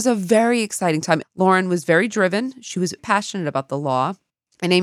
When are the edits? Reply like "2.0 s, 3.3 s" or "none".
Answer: 1.2 s, 3.0 s